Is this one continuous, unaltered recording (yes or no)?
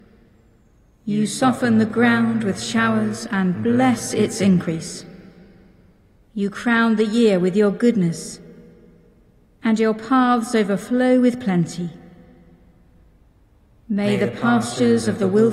yes